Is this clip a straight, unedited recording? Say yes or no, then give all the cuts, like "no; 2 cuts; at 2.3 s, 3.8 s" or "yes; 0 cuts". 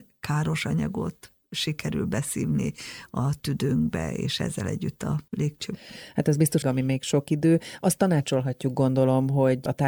no; 1 cut; at 6.6 s